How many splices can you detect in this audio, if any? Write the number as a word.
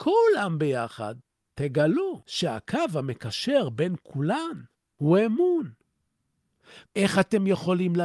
one